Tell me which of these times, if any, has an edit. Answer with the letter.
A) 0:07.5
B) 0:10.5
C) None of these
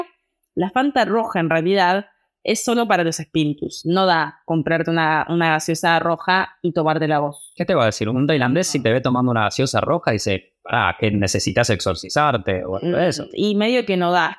C